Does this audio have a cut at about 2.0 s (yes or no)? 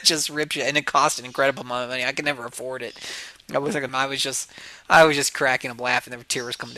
no